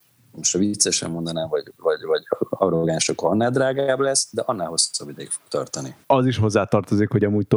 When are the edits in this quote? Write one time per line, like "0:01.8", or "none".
0:06.0